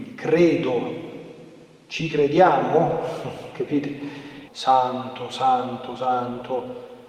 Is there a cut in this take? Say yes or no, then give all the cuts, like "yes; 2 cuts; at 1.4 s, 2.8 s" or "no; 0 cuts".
yes; 1 cut; at 4.5 s